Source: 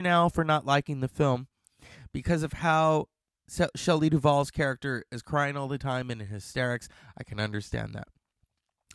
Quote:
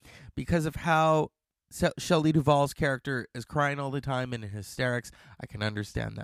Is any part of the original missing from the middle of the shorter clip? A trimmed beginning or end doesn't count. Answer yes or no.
no